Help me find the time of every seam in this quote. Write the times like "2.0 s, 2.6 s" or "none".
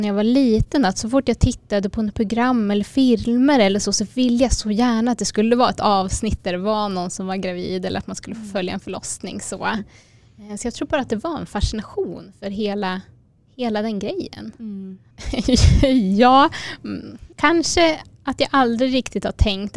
15.1 s, 17.3 s